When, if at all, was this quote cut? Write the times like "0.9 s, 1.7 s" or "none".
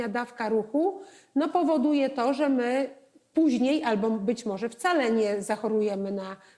none